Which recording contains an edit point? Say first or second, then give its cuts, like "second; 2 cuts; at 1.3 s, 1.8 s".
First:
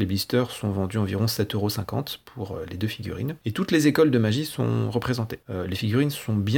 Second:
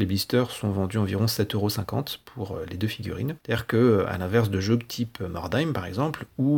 second; 1 cut; at 3.4 s